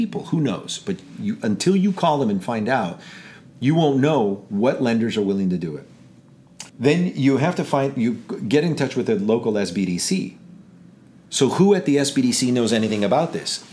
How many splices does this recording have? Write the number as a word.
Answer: one